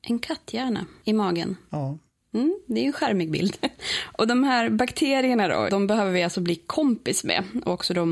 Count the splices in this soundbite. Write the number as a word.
two